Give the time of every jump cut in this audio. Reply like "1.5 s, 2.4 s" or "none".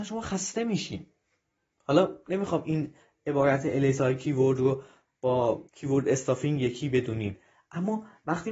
5.7 s